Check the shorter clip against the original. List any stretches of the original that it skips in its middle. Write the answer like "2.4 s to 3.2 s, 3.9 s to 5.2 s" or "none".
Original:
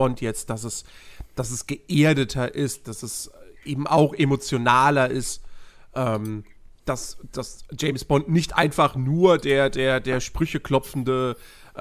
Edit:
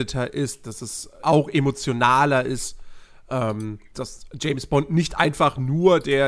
3.4 s to 3.9 s, 6.6 s to 7.3 s